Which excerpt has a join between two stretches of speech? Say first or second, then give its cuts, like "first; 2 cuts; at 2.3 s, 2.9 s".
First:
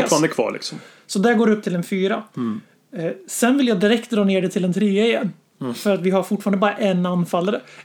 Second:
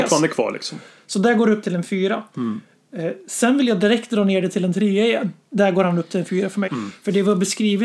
second; 2 cuts; at 5.5 s, 6.7 s